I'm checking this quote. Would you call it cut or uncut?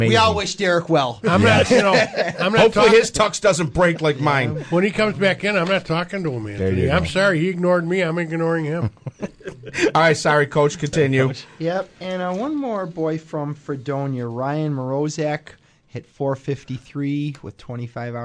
uncut